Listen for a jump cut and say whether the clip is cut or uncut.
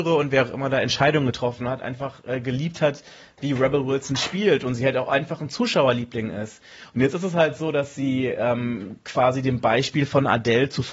uncut